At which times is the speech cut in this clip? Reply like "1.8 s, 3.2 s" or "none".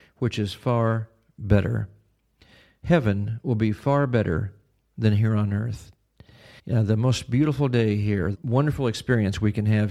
6.6 s, 8.3 s